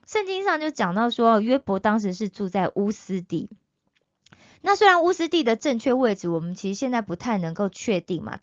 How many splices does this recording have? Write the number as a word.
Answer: zero